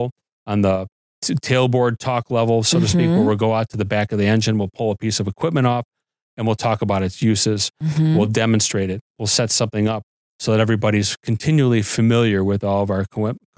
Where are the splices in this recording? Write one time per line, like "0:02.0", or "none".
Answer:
none

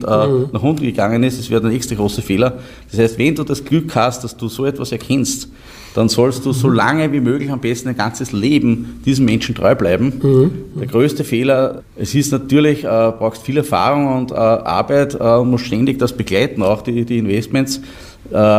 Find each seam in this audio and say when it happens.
0:10.7
0:11.8

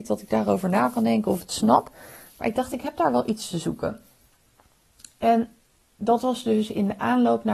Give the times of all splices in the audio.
none

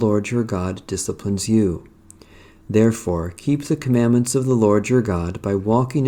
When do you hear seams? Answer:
none

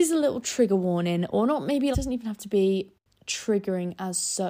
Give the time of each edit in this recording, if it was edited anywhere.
0:01.9

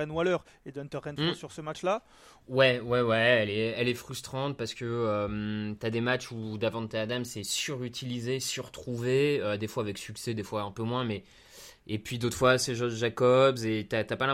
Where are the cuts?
0:02.4

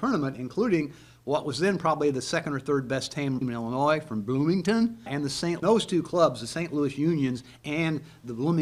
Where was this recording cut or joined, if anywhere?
0:05.6

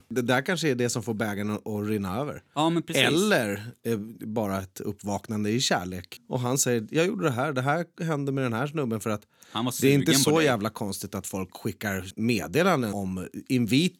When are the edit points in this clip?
none

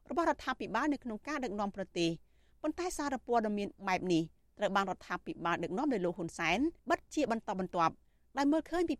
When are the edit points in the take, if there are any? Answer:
0:06.8

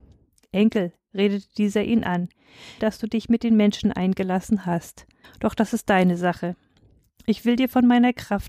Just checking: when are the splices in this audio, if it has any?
0:02.8
0:05.2

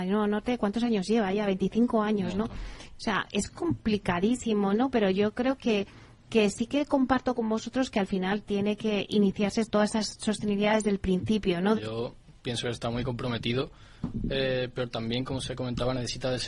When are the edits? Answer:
0:11.7

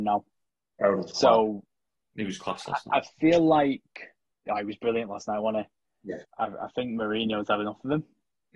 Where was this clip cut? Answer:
0:06.2

